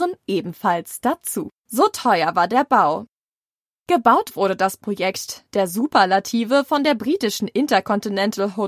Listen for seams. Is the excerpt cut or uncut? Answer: cut